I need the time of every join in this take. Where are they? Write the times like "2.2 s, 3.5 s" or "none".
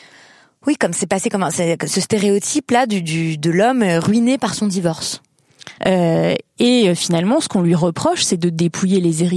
5.8 s